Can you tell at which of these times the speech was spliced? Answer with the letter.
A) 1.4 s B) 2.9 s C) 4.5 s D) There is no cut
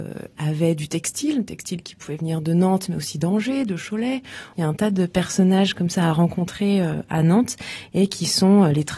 C